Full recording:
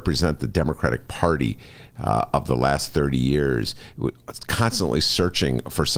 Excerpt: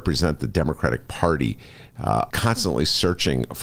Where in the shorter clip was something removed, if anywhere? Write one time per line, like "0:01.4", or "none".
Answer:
0:02.3